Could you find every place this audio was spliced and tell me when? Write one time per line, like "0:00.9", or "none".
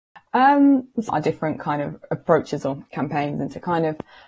0:01.1

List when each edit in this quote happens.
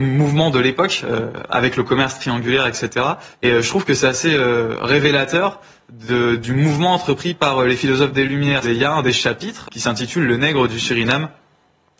0:03.3
0:08.6
0:09.6

